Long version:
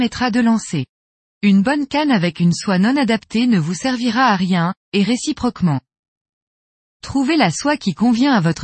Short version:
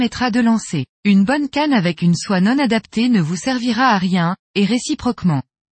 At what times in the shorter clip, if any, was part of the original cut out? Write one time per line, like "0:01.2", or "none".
0:00.9